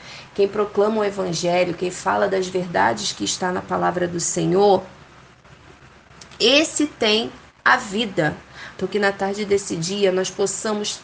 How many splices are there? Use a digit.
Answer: 1